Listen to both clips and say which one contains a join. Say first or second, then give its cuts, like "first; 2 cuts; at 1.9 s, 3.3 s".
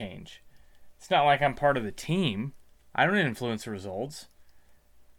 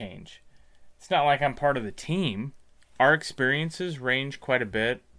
second; 1 cut; at 2.8 s